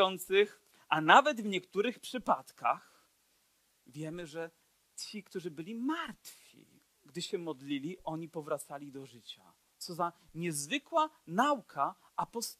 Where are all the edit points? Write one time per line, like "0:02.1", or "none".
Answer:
0:09.7